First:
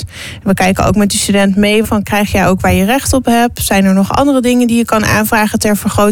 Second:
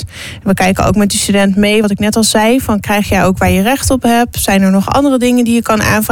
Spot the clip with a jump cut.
first; 1 cut; at 1.8 s

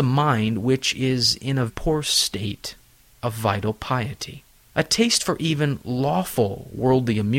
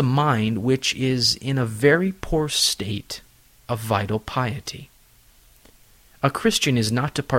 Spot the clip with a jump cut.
first; 2 cuts; at 1.7 s, 4.7 s

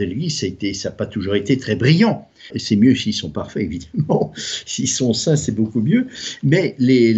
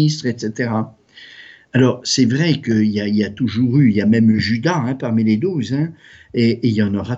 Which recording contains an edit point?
first; 1 cut; at 2.5 s

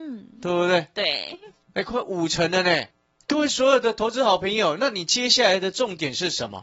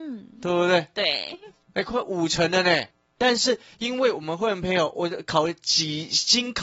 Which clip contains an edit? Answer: second; 1 cut; at 3.2 s

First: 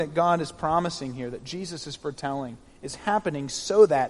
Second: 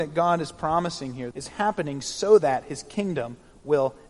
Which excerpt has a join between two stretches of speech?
second; 1 cut; at 1.3 s

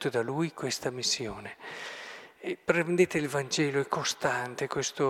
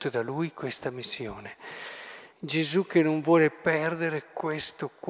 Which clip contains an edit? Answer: second; 1 cut; at 2.3 s

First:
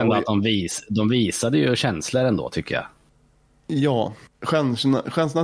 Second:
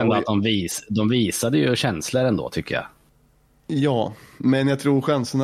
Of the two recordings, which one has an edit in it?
first; 1 cut; at 4.3 s

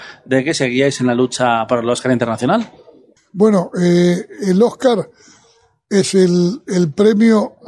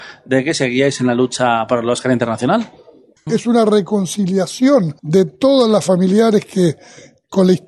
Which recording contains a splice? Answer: second; 2 cuts; at 3.3 s, 5.0 s

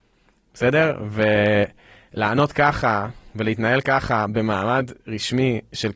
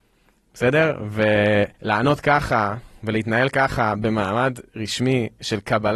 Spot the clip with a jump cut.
second; 1 cut; at 1.7 s

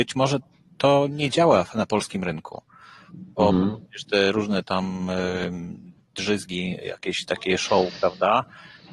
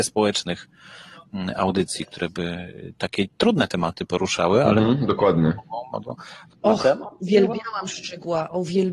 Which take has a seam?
second; 1 cut; at 6.5 s

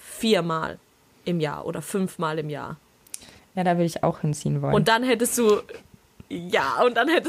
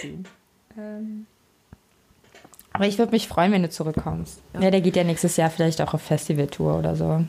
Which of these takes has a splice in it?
second; 1 cut; at 4.5 s

